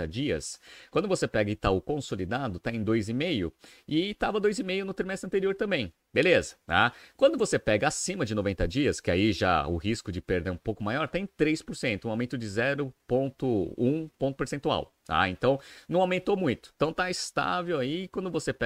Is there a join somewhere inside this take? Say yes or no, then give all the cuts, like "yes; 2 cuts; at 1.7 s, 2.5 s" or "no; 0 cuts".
no; 0 cuts